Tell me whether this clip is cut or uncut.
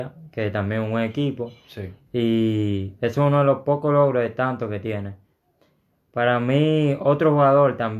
cut